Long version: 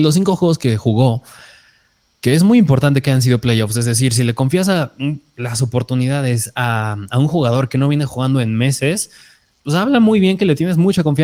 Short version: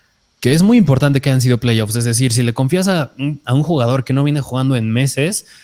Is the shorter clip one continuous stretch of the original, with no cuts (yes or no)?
no